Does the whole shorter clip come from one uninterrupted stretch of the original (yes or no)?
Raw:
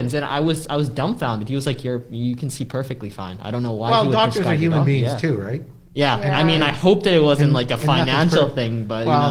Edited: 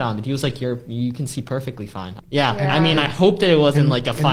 no